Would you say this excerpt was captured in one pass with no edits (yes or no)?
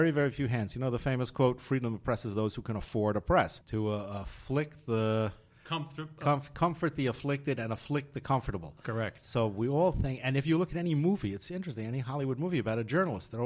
no